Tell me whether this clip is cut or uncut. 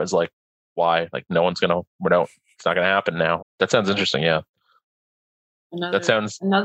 cut